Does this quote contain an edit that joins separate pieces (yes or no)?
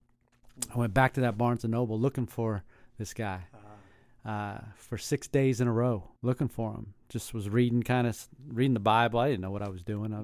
yes